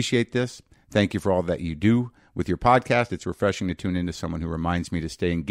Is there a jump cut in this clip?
no; 0 cuts

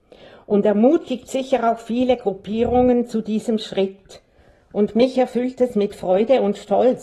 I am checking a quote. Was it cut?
no; 0 cuts

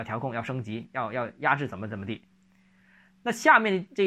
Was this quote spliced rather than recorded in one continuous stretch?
no; 0 cuts

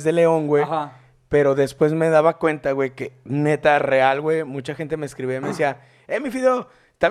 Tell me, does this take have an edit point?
no; 0 cuts

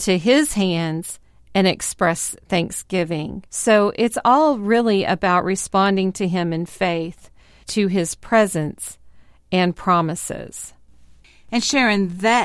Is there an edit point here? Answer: yes; 1 cut; at 3.5 s

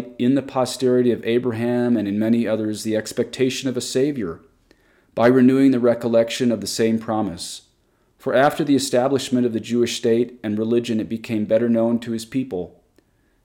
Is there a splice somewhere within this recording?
no; 0 cuts

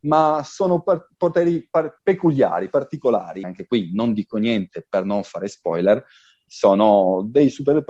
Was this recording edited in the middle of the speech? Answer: yes; 3 cuts; at 2.0 s, 3.4 s, 6.5 s

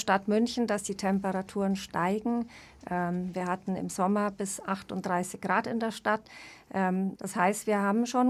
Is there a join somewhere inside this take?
yes; 1 cut; at 7.2 s

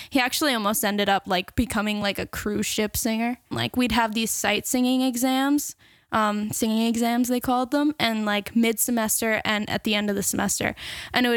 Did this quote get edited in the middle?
yes; 1 cut; at 3.5 s

